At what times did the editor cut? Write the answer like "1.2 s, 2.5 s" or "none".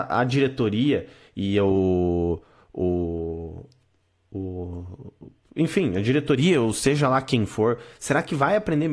none